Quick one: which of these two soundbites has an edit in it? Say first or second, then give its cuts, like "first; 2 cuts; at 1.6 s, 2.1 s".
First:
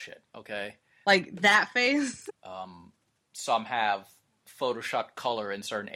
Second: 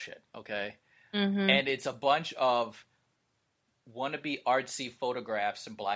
first; 2 cuts; at 1.0 s, 2.3 s